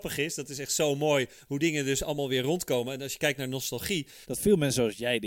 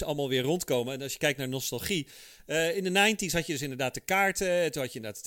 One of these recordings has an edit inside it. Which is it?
first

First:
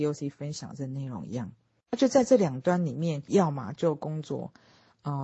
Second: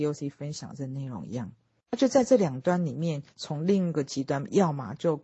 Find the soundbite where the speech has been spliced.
first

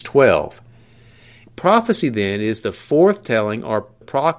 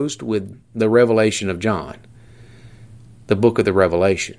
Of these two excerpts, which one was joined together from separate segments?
first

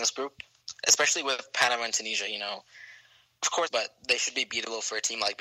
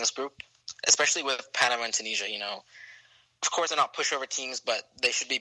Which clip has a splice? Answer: first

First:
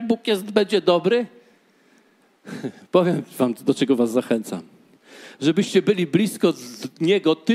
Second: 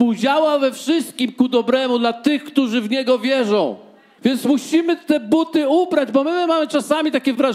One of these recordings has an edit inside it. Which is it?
second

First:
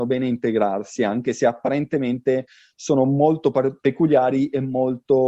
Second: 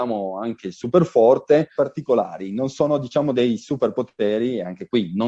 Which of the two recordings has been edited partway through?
second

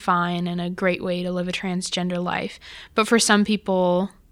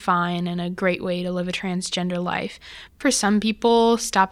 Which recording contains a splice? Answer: second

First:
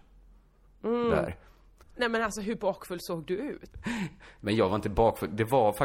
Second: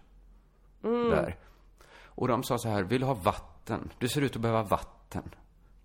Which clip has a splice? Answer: first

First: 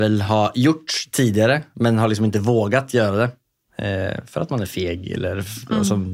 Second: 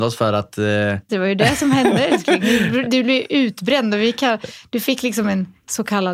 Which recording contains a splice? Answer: second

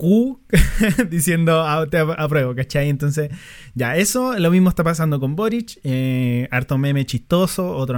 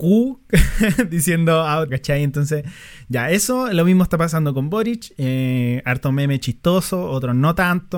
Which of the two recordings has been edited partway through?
second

